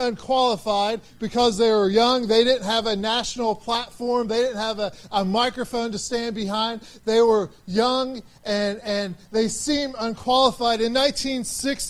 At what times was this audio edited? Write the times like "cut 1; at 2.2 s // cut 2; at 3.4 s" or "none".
none